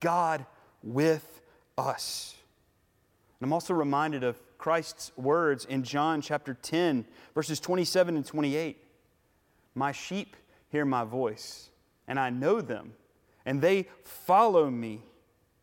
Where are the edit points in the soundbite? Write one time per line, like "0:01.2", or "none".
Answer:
none